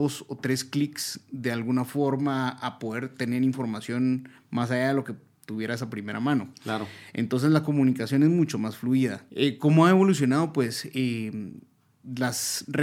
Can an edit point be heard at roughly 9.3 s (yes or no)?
yes